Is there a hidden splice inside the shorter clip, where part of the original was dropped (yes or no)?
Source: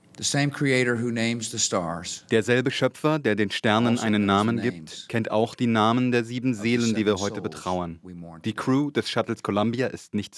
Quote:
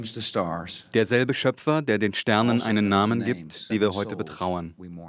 yes